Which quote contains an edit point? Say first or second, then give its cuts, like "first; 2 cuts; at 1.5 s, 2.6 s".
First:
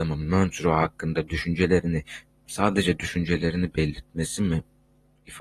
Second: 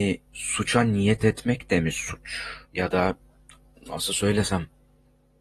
second; 1 cut; at 2.6 s